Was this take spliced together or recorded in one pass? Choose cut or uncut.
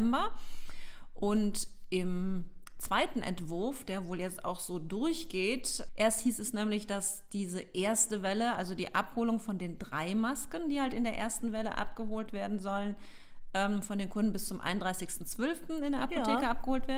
cut